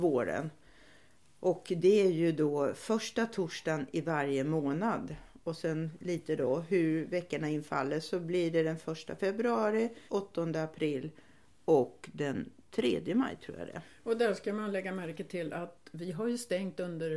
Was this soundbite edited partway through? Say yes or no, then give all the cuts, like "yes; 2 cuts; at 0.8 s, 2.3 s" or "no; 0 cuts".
yes; 1 cut; at 10.1 s